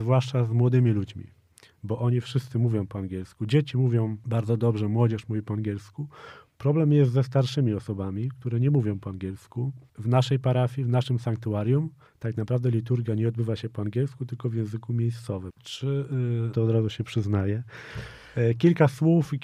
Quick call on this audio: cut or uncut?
cut